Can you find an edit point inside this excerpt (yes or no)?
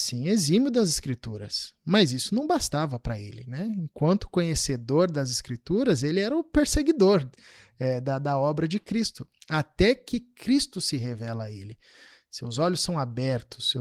no